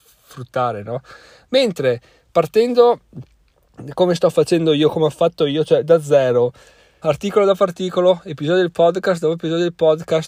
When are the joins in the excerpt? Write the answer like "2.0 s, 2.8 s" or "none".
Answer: 7.0 s